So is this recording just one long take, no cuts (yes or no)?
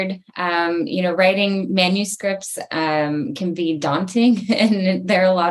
yes